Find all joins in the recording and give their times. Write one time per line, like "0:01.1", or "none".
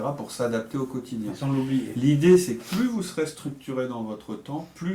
none